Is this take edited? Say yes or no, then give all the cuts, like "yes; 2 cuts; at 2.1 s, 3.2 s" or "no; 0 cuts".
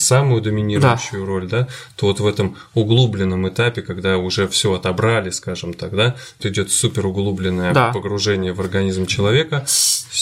yes; 1 cut; at 6.4 s